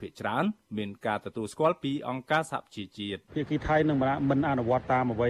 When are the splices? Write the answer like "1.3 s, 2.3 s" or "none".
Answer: 3.3 s